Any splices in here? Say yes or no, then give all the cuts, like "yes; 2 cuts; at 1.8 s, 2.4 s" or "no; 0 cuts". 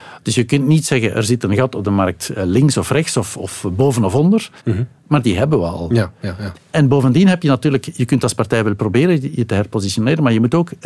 yes; 1 cut; at 4.6 s